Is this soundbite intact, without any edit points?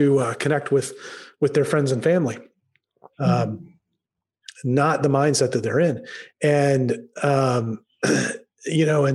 no; 1 cut; at 3.1 s

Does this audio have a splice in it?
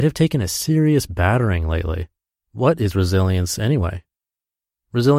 yes; 1 cut; at 2.4 s

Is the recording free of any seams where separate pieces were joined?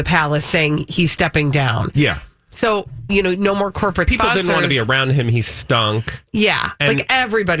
yes; 0 cuts

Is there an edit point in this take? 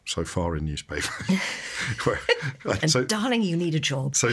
yes; 1 cut; at 2.8 s

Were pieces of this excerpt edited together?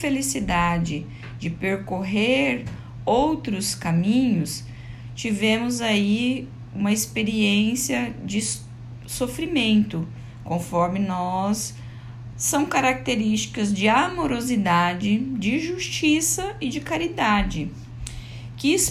yes; 1 cut; at 12.3 s

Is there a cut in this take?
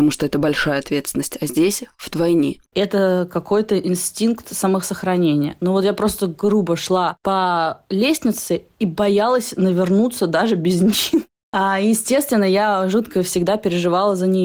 yes; 1 cut; at 2.7 s

